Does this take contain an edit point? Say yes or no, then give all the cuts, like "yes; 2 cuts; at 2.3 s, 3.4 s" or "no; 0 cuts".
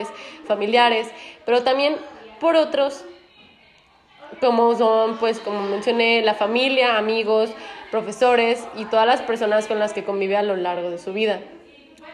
no; 0 cuts